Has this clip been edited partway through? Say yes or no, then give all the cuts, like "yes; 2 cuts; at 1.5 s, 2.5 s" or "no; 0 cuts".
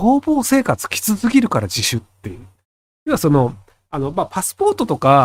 no; 0 cuts